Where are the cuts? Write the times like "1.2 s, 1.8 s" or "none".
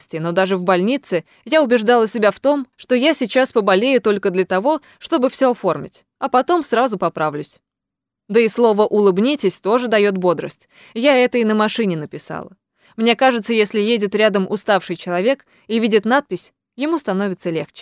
none

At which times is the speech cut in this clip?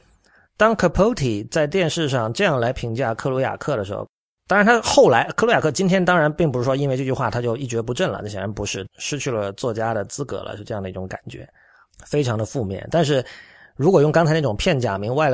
8.9 s

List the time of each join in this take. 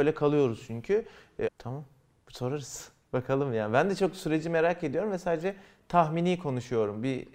1.5 s

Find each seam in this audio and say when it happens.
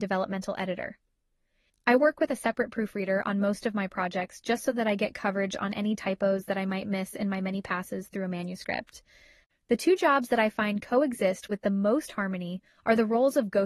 1.7 s

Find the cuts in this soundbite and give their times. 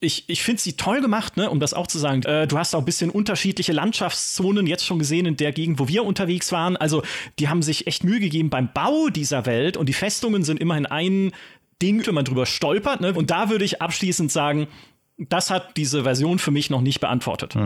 2.2 s, 12.0 s, 13.1 s

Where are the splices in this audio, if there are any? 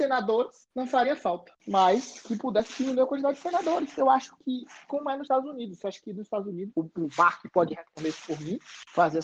1.6 s, 6.7 s

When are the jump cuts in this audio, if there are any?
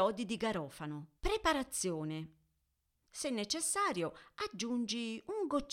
1.2 s, 3.1 s

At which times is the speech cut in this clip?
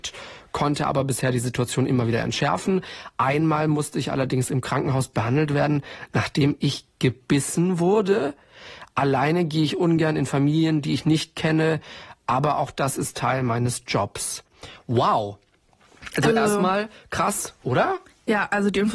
none

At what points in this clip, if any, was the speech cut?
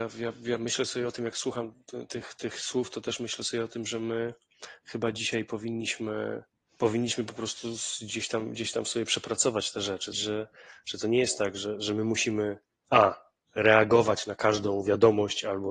10.1 s

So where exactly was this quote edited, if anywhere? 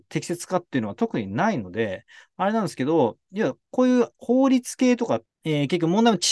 4.1 s, 5.3 s

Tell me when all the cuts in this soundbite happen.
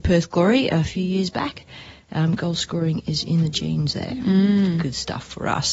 none

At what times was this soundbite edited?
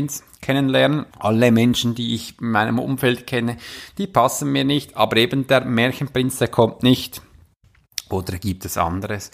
1.1 s

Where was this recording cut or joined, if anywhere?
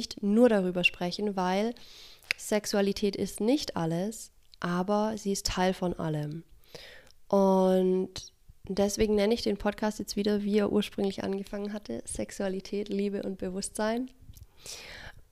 none

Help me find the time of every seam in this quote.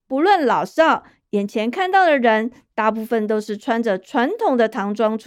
none

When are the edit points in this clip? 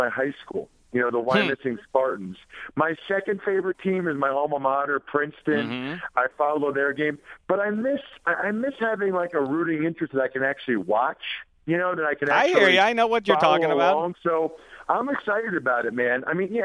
none

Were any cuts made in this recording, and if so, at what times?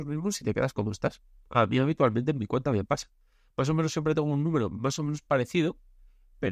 none

